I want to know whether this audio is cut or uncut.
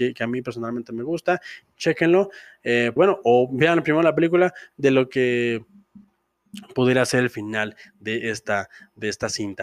cut